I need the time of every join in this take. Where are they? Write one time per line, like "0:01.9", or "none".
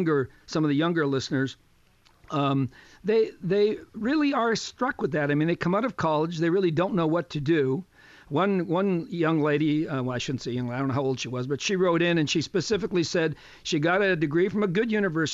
none